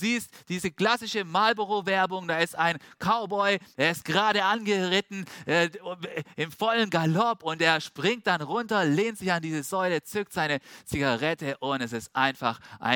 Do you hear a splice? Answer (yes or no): no